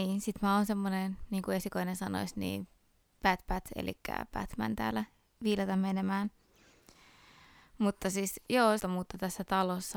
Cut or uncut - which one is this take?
cut